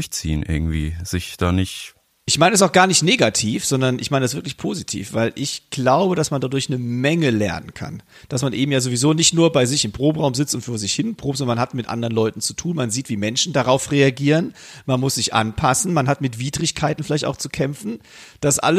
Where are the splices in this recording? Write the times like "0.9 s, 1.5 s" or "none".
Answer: none